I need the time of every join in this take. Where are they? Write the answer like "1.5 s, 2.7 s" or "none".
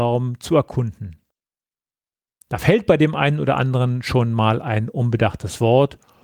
2.4 s

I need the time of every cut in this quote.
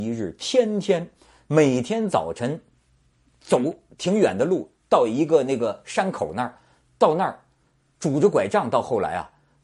none

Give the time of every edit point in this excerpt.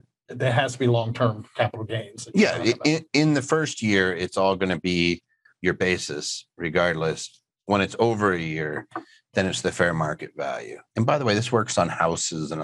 none

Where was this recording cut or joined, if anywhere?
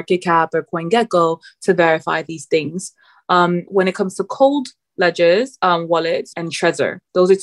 3.7 s, 6.3 s

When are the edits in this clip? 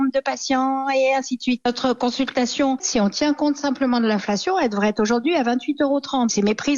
none

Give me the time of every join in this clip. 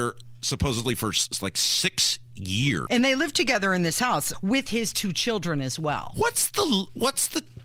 2.9 s, 4.3 s

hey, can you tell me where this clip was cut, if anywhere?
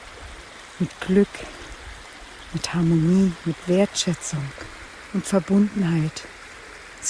none

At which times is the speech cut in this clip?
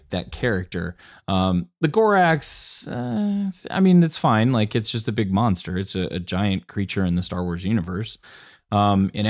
none

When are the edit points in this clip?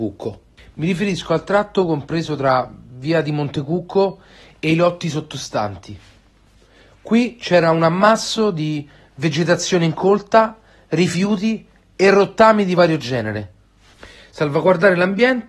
none

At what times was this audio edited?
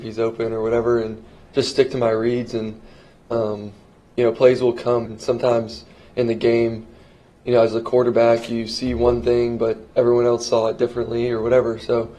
5.1 s

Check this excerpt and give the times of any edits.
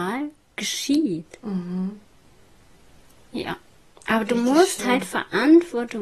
none

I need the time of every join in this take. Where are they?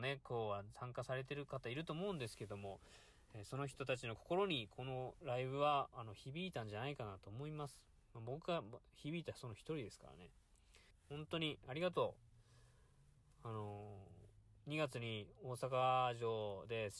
10.9 s

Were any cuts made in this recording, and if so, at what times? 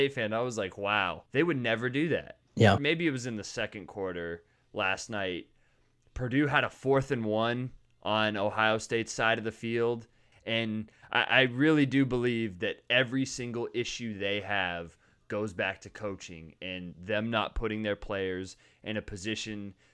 1.3 s, 2.8 s, 10.3 s

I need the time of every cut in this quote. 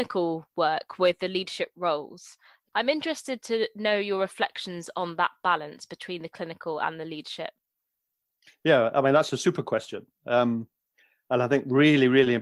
none

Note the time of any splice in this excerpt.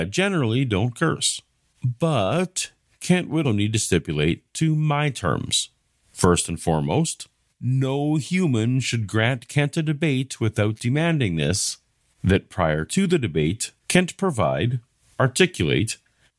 3.4 s, 7.5 s, 13.8 s

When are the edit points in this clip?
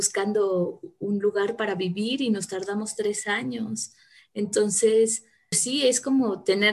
5.5 s

